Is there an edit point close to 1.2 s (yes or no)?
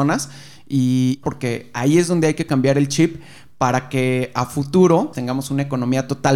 yes